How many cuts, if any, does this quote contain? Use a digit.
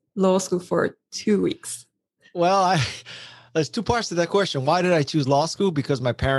0